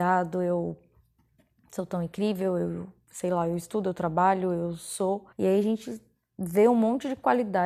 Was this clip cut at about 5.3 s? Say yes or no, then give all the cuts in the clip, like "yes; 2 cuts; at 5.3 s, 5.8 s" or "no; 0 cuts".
yes; 1 cut; at 5.3 s